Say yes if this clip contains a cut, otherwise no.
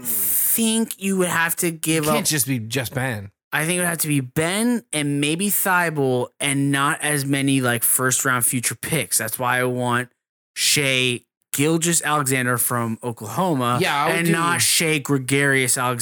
no